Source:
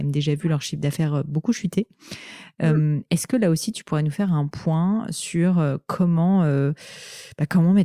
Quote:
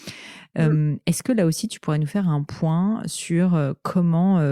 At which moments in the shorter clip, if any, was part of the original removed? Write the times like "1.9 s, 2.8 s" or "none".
none